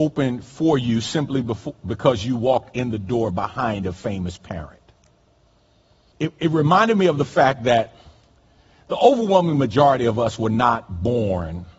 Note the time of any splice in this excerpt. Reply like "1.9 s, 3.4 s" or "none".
6.1 s